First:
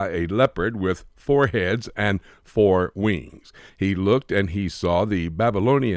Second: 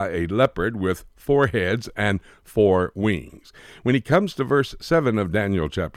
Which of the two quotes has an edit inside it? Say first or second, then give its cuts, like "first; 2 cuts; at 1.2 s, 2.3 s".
first; 1 cut; at 3.7 s